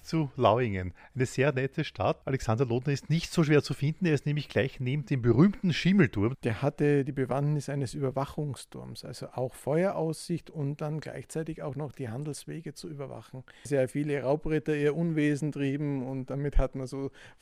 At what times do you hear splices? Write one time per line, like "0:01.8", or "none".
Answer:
0:06.3
0:13.7